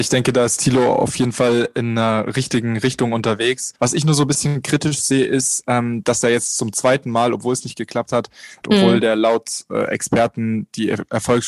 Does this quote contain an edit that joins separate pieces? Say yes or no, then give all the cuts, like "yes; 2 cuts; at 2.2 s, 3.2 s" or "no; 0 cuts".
yes; 2 cuts; at 3.8 s, 8.6 s